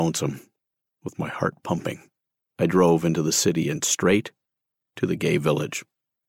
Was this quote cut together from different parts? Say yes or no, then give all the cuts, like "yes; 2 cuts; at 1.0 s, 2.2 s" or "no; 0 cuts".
no; 0 cuts